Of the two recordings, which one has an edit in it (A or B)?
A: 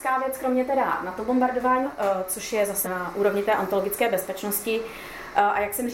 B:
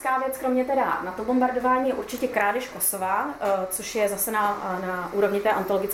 A